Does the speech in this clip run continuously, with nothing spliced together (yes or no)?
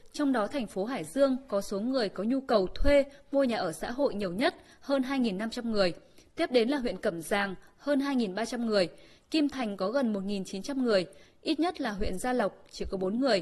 yes